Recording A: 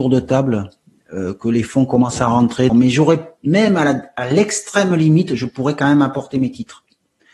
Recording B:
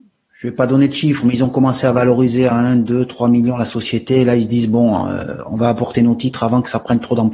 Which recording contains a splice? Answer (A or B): A